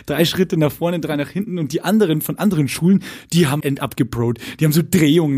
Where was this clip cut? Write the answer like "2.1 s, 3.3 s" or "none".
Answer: 3.6 s